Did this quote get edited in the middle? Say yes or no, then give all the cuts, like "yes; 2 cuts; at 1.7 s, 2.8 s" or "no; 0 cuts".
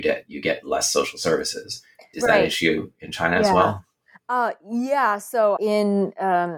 yes; 2 cuts; at 2.1 s, 5.6 s